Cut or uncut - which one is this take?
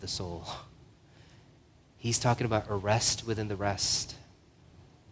uncut